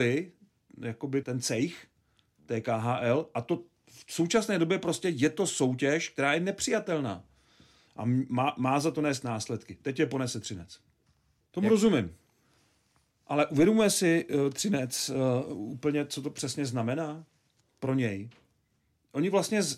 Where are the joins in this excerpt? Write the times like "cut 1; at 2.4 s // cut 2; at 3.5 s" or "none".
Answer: cut 1; at 1.2 s // cut 2; at 7.9 s // cut 3; at 11.5 s